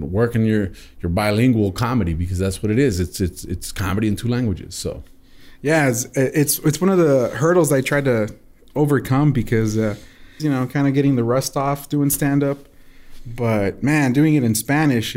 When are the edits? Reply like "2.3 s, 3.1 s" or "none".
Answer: 10.4 s